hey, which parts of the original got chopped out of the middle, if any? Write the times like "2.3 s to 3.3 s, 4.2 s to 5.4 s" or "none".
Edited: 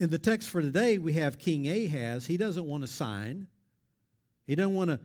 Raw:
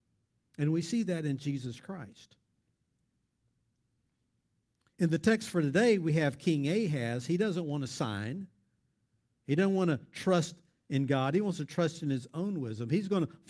none